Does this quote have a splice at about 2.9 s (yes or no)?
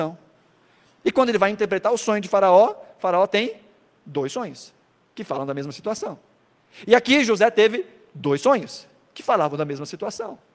no